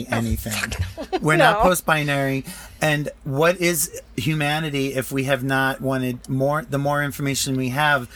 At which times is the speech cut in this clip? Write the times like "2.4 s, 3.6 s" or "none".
none